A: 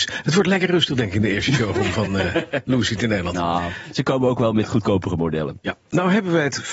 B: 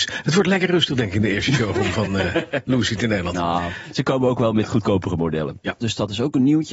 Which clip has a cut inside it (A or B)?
B